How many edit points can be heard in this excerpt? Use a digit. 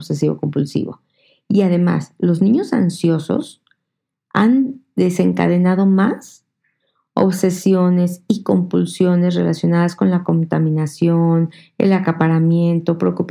0